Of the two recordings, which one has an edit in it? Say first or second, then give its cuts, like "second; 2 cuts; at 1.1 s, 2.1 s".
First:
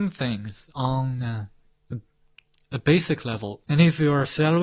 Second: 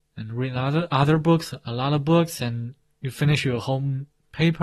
first; 1 cut; at 3.6 s